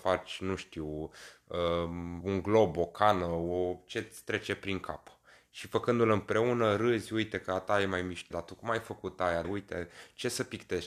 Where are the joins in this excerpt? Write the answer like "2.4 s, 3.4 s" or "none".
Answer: 2.2 s, 8.3 s, 9.4 s